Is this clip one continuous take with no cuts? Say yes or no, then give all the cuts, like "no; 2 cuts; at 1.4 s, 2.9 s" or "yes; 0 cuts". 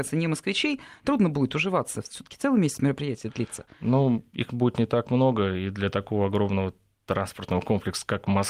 yes; 0 cuts